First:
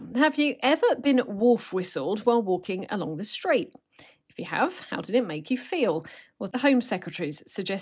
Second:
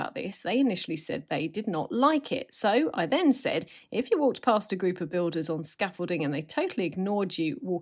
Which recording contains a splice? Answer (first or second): first